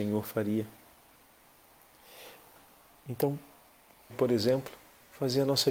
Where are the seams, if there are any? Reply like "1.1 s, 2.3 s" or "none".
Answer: 4.1 s